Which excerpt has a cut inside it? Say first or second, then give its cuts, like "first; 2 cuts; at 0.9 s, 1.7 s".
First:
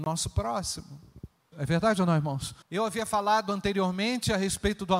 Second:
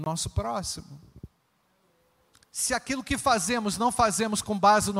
first; 2 cuts; at 1.5 s, 2.6 s